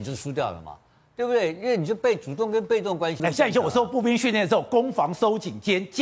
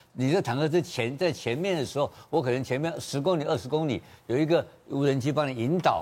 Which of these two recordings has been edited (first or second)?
first